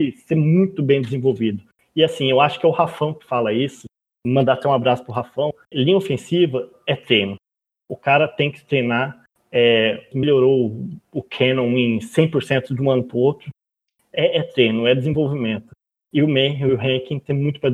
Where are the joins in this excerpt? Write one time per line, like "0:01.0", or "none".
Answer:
0:05.7
0:10.1